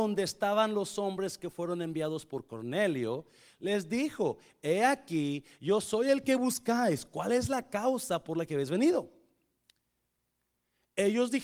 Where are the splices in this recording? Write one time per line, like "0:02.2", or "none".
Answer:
none